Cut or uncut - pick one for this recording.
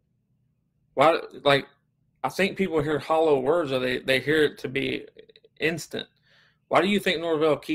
uncut